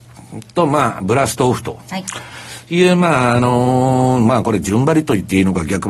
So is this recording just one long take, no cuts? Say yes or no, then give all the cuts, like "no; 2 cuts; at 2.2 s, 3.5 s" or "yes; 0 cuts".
yes; 0 cuts